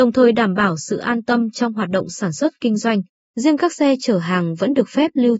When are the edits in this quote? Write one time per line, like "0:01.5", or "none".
0:03.1